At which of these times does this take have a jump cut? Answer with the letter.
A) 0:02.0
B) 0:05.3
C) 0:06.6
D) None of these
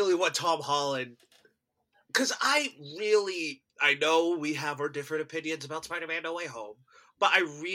D